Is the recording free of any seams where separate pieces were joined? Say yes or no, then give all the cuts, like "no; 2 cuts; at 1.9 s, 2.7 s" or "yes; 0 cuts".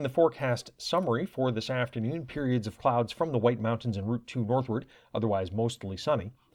yes; 0 cuts